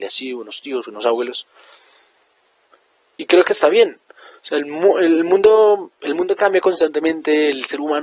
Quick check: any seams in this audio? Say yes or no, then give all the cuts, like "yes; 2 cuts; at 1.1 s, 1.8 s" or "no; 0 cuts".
no; 0 cuts